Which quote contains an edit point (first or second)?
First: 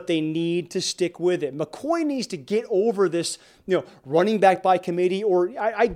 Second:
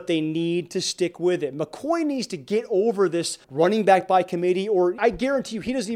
second